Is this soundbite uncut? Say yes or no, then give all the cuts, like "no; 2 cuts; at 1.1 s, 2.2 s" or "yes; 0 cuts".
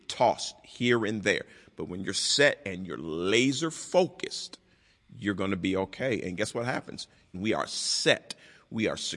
no; 1 cut; at 7.3 s